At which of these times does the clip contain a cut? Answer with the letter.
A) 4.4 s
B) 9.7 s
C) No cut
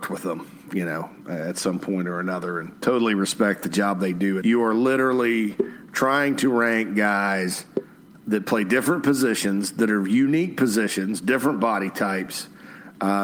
A